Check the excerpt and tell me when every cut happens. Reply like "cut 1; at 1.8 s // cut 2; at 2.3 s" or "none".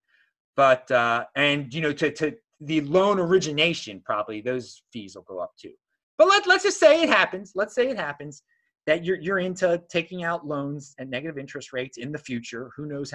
none